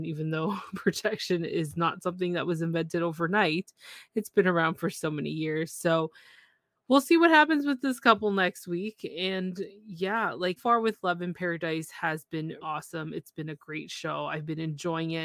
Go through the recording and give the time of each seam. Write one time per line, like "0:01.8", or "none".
0:10.6
0:12.6